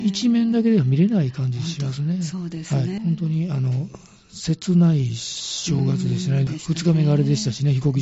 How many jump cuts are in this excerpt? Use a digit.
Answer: 2